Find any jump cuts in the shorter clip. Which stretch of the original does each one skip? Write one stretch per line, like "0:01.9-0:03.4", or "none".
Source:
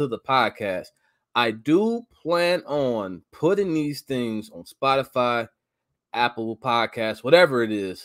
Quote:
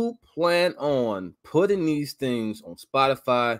none